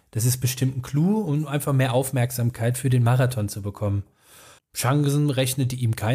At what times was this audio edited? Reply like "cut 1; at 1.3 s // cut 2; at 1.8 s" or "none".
cut 1; at 4.6 s